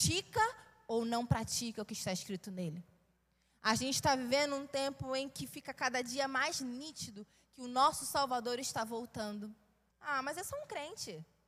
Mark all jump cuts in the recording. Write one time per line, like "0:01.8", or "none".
0:09.9